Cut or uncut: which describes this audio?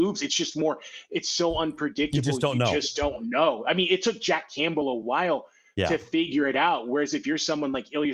uncut